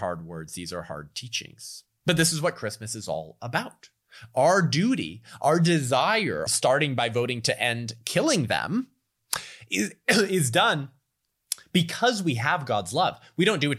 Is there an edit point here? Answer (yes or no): yes